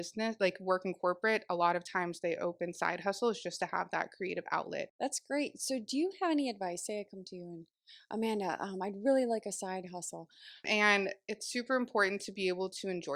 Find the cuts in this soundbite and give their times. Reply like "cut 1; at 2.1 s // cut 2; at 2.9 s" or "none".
cut 1; at 4.9 s // cut 2; at 10.6 s